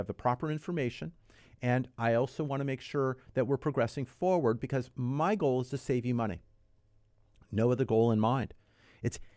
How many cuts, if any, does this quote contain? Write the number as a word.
zero